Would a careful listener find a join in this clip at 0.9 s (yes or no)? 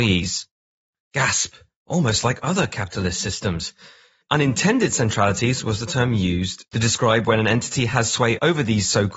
yes